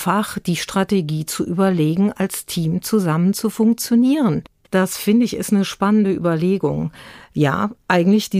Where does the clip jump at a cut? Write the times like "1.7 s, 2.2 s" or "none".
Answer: 4.6 s